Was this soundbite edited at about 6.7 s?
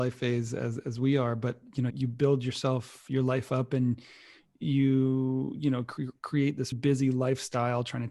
yes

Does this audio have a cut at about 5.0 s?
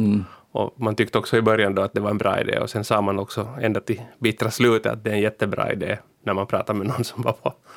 no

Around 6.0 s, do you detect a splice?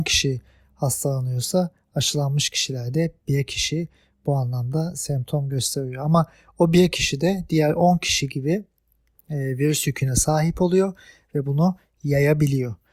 no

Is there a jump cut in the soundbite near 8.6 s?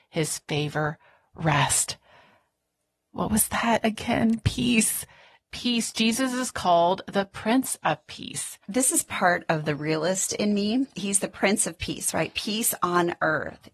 yes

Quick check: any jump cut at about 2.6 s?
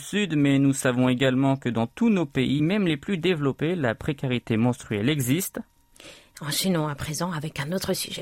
no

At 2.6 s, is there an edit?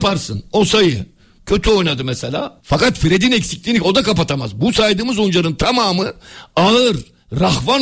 yes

